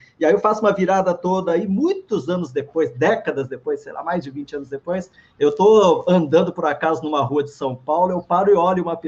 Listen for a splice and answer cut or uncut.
uncut